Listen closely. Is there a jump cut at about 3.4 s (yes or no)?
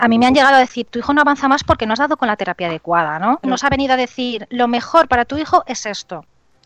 yes